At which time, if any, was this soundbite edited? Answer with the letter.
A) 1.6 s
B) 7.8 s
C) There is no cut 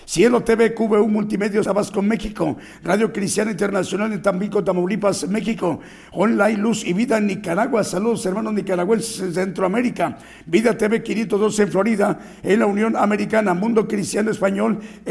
A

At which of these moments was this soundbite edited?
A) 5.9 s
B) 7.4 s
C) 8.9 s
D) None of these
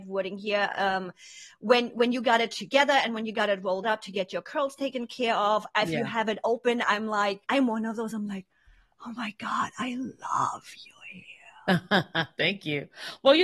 B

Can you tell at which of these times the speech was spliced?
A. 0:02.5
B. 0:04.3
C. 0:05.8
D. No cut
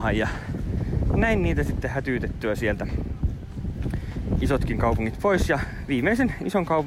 C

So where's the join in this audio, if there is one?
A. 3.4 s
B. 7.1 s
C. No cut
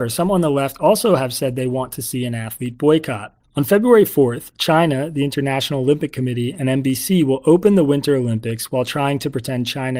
A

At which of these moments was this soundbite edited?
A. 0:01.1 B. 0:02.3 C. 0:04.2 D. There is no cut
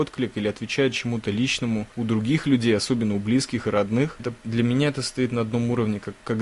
C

